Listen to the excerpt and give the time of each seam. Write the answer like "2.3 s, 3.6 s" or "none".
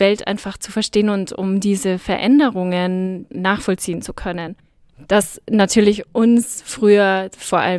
3.3 s